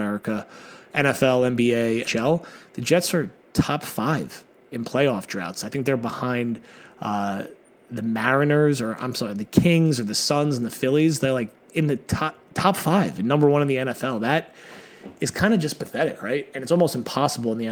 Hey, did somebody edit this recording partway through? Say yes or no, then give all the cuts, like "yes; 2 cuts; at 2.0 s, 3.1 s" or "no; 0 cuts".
yes; 1 cut; at 2.0 s